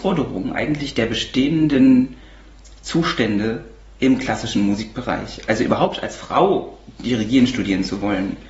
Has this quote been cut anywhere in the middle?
no; 0 cuts

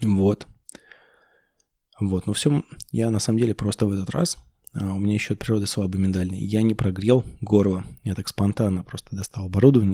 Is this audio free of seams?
yes; 0 cuts

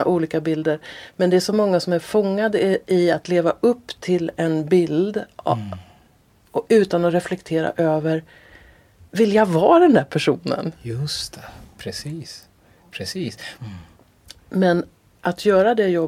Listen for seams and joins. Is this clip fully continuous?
no; 1 cut; at 13.6 s

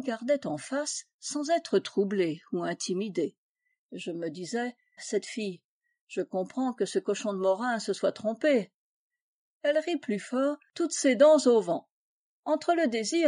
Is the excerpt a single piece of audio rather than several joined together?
no; 2 cuts; at 5.0 s, 9.5 s

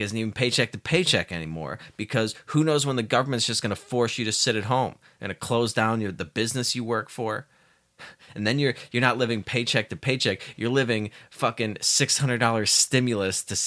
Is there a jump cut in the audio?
no; 0 cuts

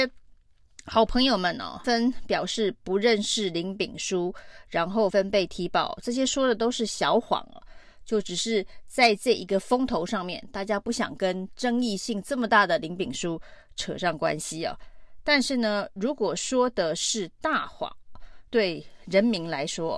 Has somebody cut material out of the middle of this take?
yes; 3 cuts; at 1.8 s, 5.1 s, 18.5 s

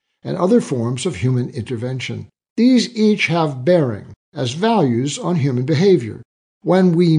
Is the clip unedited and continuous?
no; 1 cut; at 2.5 s

